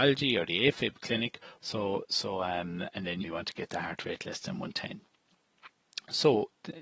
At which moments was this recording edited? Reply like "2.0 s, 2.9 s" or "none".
1.6 s, 3.2 s